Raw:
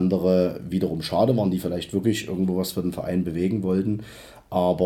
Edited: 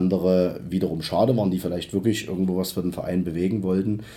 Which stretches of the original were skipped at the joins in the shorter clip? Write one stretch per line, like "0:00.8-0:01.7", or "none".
none